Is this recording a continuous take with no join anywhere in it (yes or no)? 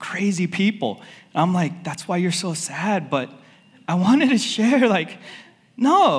yes